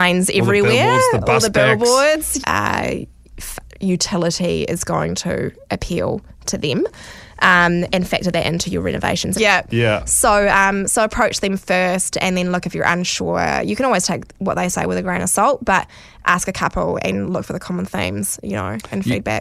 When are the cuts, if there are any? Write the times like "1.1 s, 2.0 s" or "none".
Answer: 2.4 s, 9.3 s

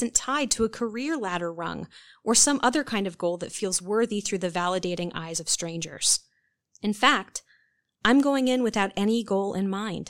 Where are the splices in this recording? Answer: 6.6 s

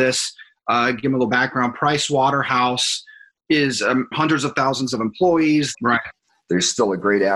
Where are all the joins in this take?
4.1 s, 5.7 s

